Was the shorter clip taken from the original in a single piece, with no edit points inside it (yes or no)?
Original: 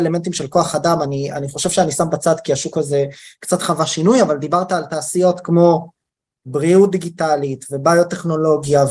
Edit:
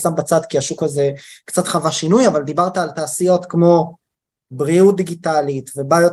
yes